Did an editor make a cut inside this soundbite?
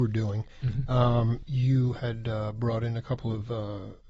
yes; 1 cut; at 1.4 s

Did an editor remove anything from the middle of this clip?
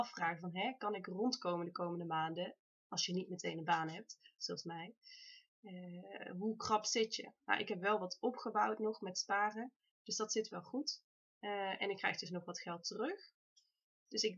no; 0 cuts

